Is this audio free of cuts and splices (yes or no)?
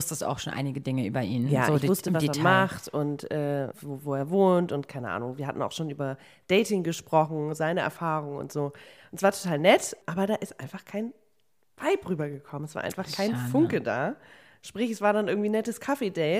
no